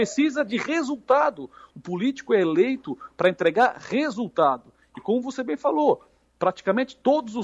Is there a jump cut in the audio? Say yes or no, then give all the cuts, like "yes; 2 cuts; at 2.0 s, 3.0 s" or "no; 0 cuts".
no; 0 cuts